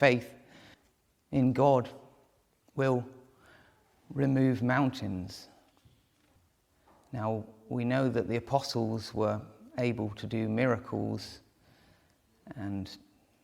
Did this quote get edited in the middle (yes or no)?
no